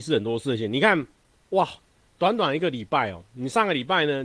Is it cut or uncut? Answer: uncut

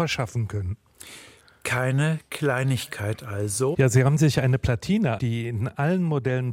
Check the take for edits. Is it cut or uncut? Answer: cut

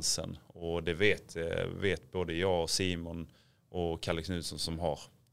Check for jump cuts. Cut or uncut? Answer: uncut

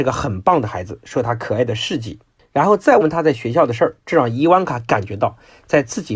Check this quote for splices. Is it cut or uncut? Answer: cut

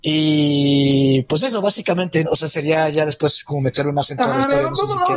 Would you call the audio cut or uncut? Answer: cut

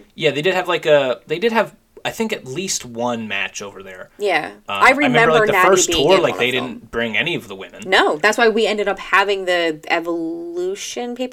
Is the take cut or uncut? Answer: uncut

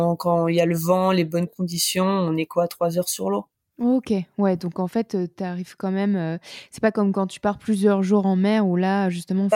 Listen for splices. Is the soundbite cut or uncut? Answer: uncut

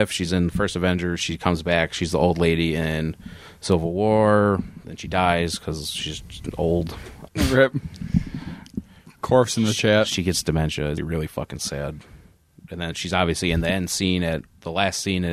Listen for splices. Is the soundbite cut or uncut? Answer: cut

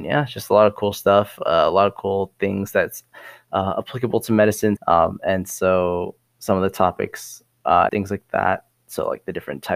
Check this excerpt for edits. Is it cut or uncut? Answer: cut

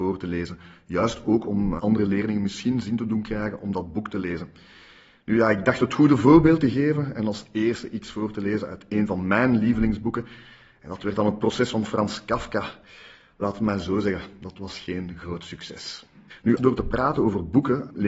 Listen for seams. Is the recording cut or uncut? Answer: cut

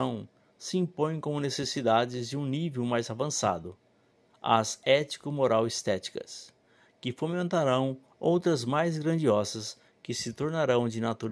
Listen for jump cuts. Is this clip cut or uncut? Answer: uncut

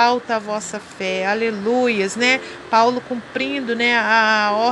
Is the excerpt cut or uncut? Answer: uncut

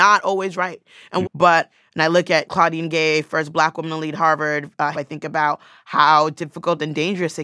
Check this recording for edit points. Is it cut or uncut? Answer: cut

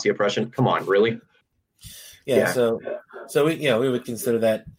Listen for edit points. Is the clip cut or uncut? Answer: uncut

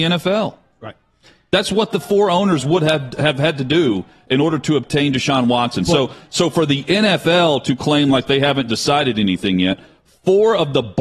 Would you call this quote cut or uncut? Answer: uncut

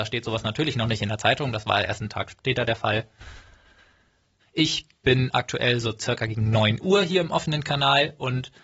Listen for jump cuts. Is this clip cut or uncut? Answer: cut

